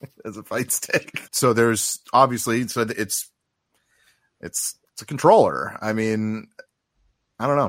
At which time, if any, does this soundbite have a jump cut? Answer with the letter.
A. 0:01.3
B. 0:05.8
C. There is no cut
A